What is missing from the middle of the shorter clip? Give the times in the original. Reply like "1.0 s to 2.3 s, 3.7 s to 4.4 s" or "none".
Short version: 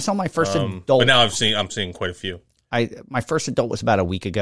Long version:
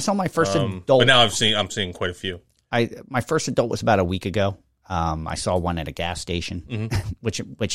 none